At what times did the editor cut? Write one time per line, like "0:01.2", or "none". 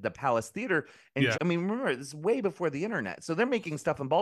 0:01.3